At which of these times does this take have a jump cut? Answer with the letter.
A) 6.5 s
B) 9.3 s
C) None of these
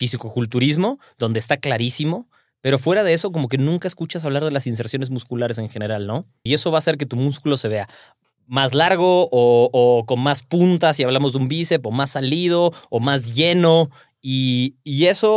A